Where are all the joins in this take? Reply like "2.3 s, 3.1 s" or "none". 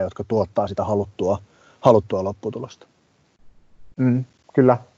3.9 s